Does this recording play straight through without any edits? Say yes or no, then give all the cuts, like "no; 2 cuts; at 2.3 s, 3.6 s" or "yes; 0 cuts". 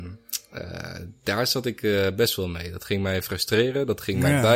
yes; 0 cuts